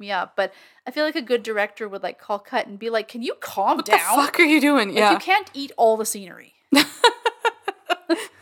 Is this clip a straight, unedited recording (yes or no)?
yes